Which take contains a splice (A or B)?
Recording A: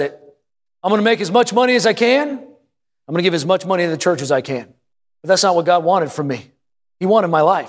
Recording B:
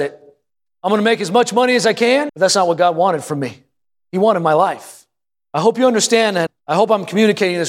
B